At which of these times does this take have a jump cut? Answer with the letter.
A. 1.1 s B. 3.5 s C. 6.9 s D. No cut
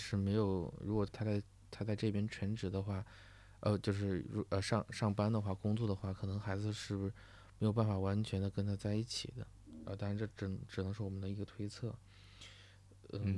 A